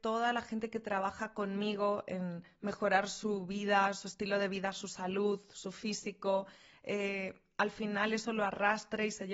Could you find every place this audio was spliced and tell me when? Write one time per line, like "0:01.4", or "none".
none